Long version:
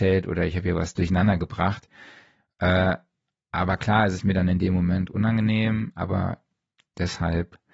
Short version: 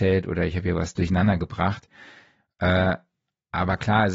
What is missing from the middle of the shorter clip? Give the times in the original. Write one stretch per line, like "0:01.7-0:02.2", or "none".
none

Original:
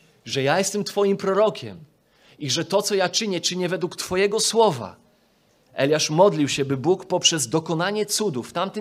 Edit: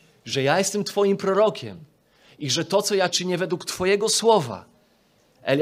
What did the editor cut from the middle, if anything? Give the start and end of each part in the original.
0:03.1-0:03.4

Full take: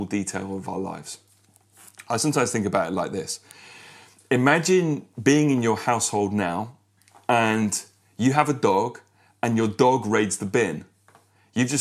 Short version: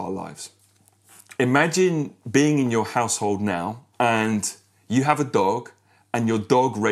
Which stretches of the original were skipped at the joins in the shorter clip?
0:02.0-0:04.3
0:06.8-0:07.2

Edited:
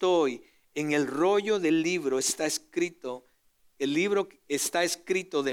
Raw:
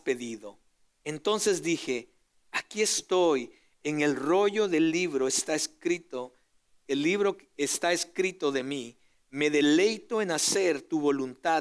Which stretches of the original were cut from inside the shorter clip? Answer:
none

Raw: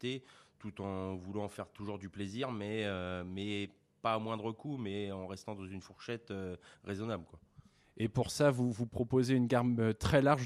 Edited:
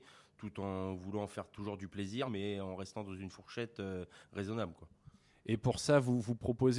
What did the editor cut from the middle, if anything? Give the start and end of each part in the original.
0:02.5-0:04.8

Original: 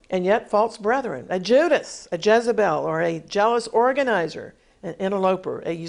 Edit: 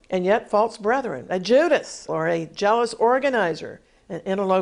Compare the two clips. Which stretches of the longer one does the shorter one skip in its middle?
0:02.1-0:02.8

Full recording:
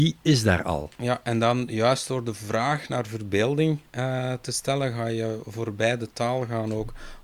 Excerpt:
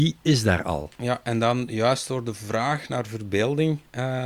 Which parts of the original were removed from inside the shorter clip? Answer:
none

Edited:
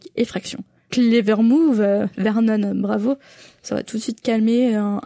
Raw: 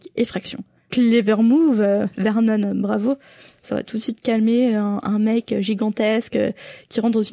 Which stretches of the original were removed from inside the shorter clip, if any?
none

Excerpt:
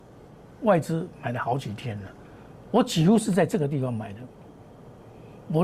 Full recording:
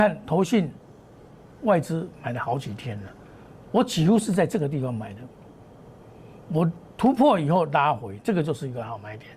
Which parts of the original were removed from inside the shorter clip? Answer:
none

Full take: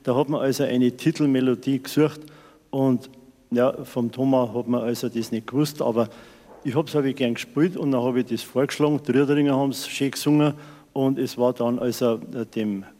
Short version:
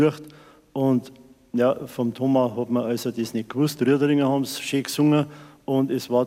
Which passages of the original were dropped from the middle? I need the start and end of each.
0:05.7-0:09.0

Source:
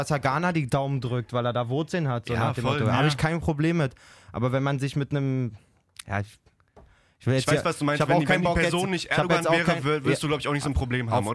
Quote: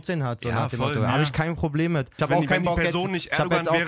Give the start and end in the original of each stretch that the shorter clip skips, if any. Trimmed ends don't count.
0:04.0-0:08.0

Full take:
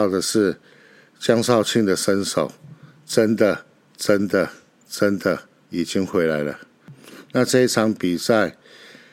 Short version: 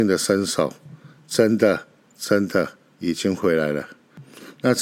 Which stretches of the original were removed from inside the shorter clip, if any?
0:03.9-0:04.8

